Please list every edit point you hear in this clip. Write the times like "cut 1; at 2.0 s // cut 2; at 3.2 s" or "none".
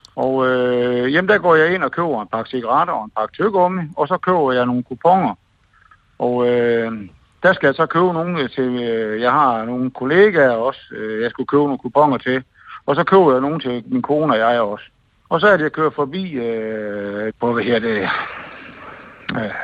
cut 1; at 15.3 s // cut 2; at 17.3 s